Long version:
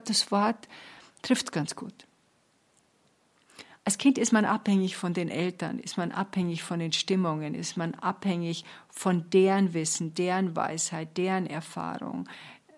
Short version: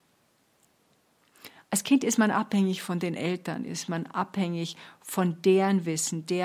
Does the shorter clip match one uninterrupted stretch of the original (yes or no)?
no